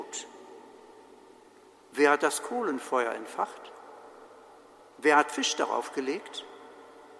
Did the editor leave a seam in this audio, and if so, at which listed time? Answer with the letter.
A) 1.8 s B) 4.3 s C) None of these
C